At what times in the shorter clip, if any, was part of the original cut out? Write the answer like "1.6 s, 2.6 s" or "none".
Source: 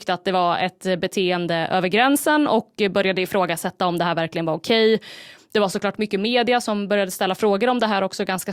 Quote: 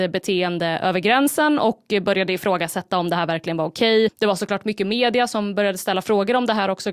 4.1 s